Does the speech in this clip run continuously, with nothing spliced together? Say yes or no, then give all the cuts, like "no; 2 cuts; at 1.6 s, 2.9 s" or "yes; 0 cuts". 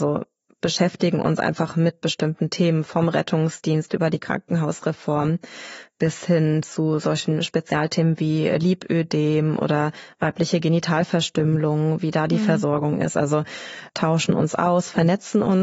yes; 0 cuts